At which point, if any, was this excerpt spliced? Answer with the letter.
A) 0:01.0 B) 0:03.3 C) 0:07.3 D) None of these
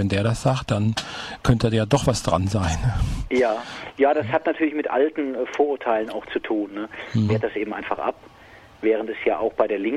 C